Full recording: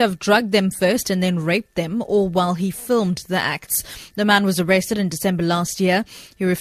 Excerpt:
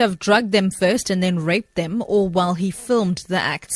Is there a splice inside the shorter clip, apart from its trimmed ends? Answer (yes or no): no